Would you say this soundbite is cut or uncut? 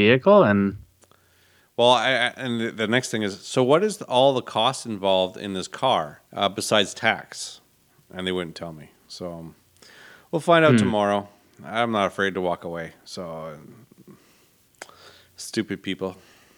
cut